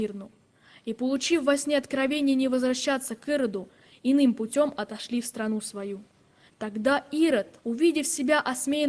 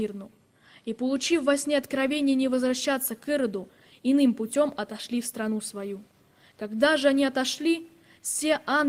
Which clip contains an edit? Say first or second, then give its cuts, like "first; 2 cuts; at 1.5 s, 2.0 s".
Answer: first; 2 cuts; at 6.5 s, 7.6 s